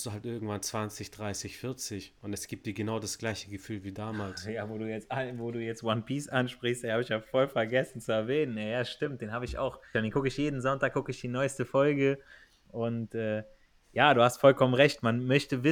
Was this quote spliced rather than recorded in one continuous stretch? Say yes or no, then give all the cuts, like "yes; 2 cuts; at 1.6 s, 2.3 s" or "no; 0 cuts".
yes; 1 cut; at 9.9 s